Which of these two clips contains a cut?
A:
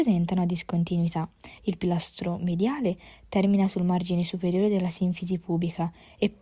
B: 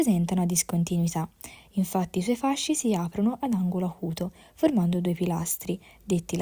A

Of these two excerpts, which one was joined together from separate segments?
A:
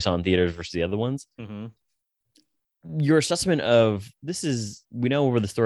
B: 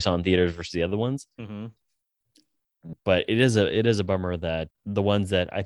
B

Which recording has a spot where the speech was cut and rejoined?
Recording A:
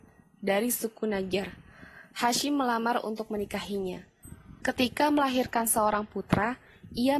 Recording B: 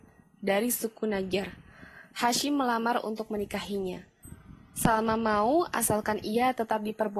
A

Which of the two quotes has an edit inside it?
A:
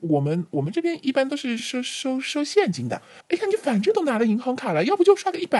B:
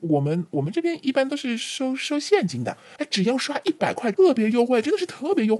B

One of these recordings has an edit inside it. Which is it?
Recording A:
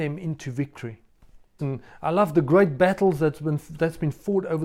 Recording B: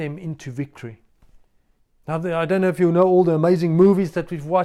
A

